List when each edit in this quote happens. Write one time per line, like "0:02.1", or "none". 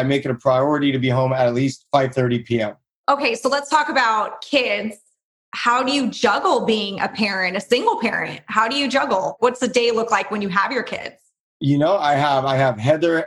none